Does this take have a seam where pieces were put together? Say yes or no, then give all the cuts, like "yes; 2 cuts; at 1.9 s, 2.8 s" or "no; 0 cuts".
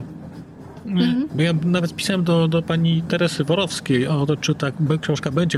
yes; 1 cut; at 1.3 s